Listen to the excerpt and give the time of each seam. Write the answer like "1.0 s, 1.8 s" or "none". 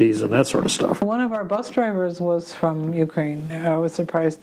none